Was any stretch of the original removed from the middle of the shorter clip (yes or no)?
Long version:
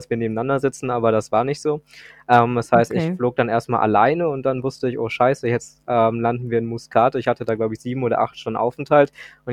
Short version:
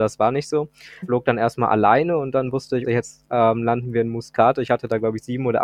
yes